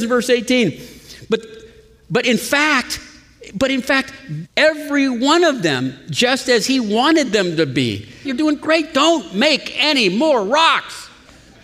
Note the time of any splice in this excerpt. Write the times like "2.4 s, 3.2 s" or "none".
4.4 s, 8.2 s

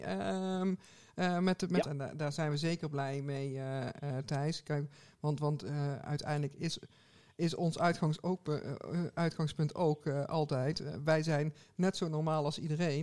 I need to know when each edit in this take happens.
1.8 s

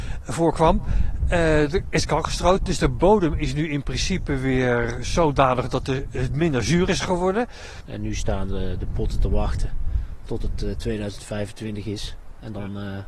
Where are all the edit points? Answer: 7.8 s

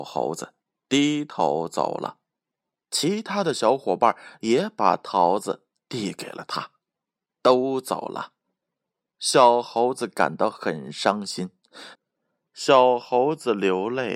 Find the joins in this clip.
11.9 s

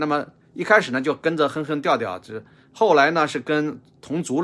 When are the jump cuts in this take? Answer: none

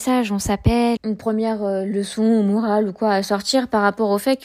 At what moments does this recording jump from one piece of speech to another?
1.0 s

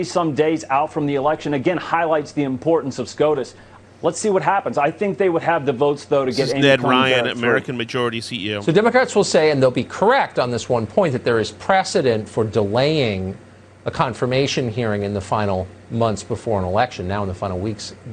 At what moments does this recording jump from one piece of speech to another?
3.8 s

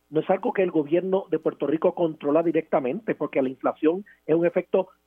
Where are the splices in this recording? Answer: none

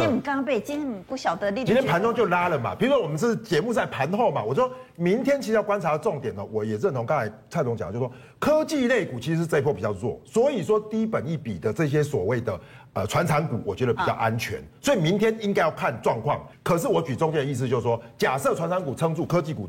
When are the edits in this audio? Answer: 16.5 s

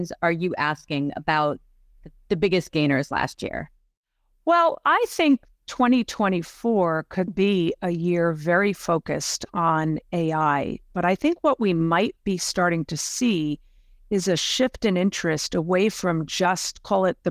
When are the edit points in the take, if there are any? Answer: 7.3 s

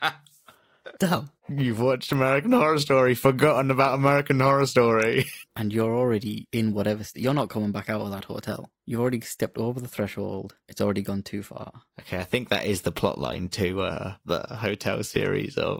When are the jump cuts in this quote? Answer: 1.0 s, 5.4 s

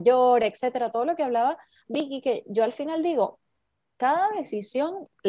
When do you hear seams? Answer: none

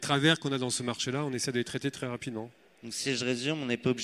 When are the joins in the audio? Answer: none

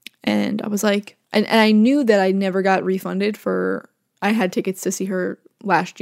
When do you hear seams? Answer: 1.2 s

